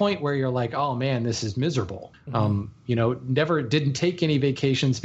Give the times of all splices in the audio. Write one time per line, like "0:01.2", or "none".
0:02.1